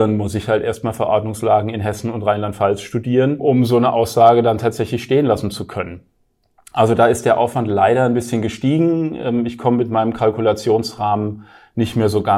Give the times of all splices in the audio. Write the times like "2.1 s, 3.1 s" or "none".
none